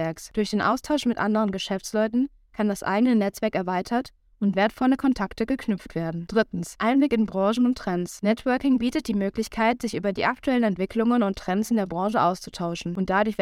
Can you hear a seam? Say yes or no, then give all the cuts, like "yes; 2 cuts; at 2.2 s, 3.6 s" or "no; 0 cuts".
no; 0 cuts